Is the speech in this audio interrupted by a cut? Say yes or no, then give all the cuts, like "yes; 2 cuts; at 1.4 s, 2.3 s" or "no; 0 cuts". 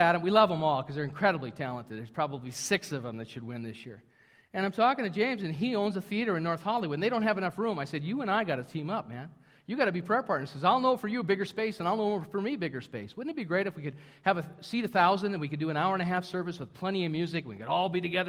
no; 0 cuts